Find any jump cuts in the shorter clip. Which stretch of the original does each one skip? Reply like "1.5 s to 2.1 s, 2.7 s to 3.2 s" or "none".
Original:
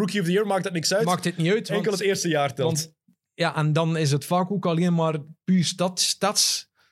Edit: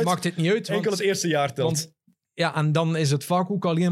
none